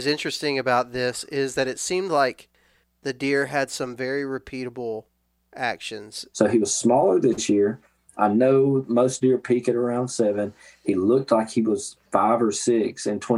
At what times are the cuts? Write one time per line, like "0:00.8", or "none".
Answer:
0:06.3